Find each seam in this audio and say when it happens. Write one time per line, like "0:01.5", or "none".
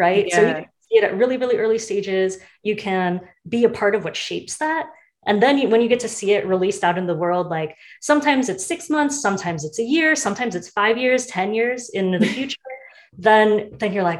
none